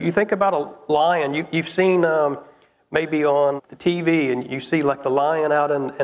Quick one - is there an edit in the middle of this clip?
yes; 1 cut; at 3.6 s

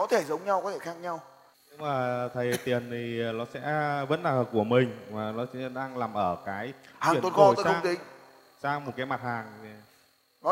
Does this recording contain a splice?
yes; 1 cut; at 1.5 s

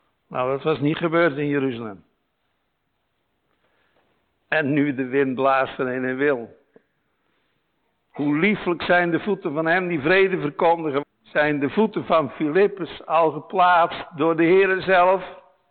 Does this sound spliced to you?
yes; 1 cut; at 11.0 s

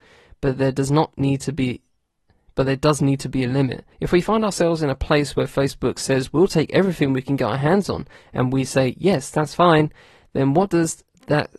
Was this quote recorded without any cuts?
no; 1 cut; at 3.9 s

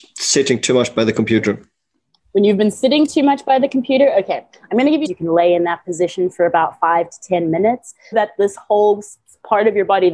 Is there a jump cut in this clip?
yes; 2 cuts; at 5.1 s, 8.1 s

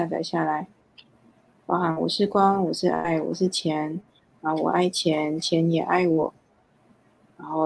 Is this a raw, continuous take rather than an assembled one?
yes; 0 cuts

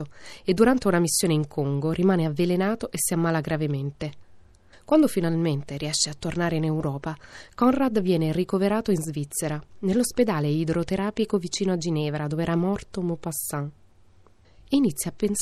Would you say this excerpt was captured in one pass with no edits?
yes; 0 cuts

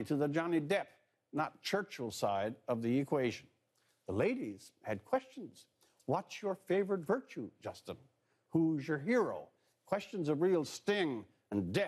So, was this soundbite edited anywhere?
no; 0 cuts

